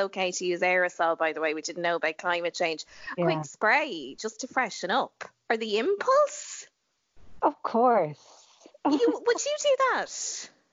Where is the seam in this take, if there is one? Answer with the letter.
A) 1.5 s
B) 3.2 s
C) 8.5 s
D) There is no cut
B